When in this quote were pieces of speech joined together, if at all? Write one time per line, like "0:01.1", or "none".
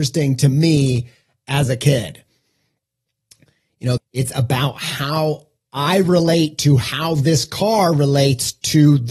0:04.0